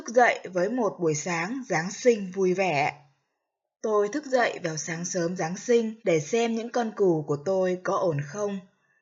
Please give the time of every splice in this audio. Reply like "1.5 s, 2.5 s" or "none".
3.8 s, 6.0 s